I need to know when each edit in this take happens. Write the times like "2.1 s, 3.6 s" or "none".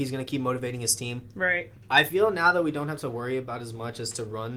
none